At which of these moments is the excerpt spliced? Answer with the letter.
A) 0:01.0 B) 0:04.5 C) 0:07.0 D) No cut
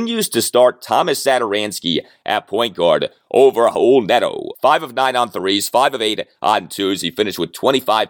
B